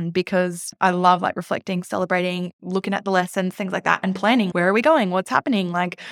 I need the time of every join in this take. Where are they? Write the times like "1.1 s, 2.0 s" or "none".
4.5 s